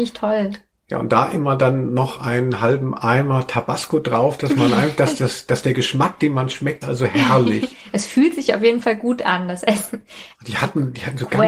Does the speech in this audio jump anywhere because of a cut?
yes; 2 cuts; at 6.8 s, 10.3 s

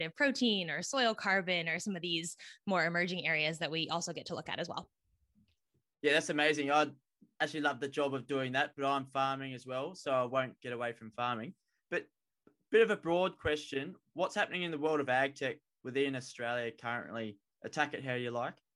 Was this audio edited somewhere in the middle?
no; 0 cuts

